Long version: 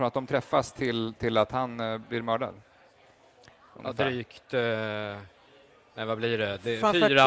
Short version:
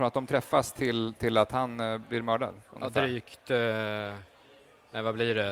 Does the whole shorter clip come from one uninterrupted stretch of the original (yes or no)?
no